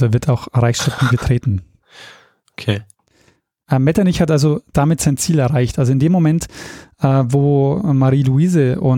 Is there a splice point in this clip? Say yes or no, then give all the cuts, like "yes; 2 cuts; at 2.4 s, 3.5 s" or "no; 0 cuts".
no; 0 cuts